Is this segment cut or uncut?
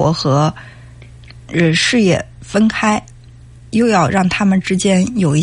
uncut